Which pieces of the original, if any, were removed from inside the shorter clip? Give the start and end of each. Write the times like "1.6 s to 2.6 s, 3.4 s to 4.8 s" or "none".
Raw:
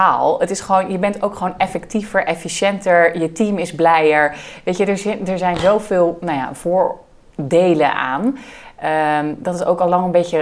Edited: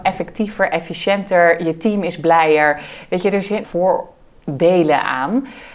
5.2 s to 6.6 s